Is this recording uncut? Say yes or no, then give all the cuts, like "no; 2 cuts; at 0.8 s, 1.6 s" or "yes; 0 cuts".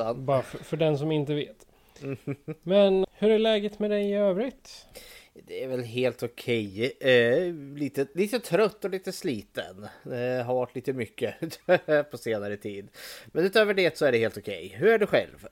no; 1 cut; at 3.0 s